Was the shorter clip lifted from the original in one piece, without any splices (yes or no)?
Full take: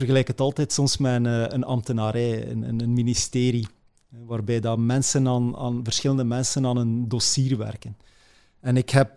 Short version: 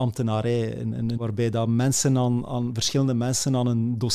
no